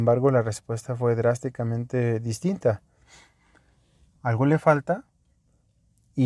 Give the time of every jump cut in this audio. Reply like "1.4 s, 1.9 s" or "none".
none